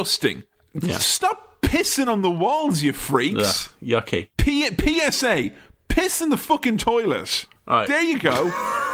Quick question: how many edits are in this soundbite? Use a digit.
0